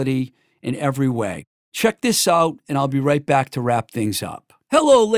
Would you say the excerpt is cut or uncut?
uncut